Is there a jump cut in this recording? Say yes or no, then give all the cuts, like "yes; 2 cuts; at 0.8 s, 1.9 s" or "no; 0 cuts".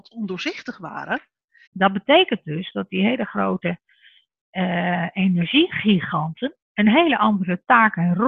yes; 2 cuts; at 1.7 s, 6.6 s